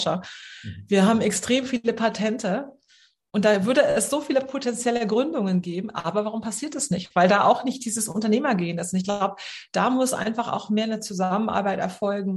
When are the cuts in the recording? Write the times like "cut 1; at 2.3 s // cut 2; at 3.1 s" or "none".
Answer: none